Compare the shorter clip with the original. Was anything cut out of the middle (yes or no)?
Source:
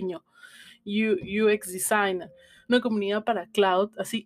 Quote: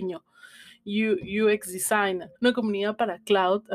yes